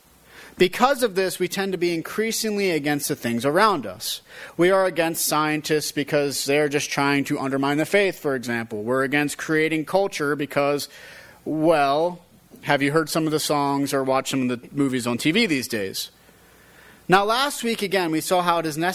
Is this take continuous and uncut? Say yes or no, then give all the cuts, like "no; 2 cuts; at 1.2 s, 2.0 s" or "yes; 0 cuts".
yes; 0 cuts